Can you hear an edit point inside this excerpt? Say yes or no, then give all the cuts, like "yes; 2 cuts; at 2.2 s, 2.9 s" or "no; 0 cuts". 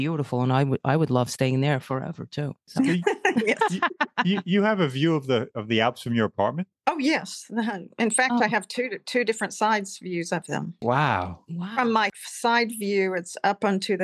no; 0 cuts